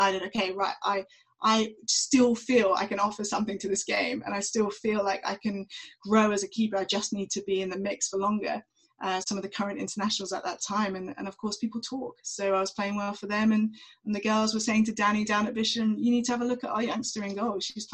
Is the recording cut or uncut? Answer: cut